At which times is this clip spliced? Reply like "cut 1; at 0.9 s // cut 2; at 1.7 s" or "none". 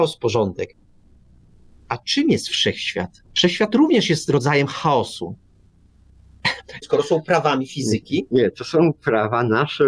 cut 1; at 3.3 s // cut 2; at 6.8 s

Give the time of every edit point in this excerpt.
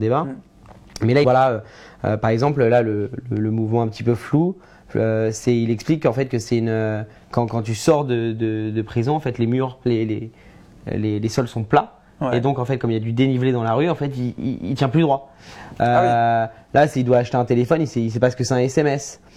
cut 1; at 1.2 s

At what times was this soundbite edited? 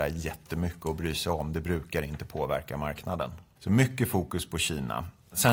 cut 1; at 3.6 s

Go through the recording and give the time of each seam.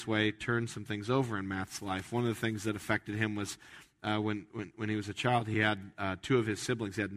none

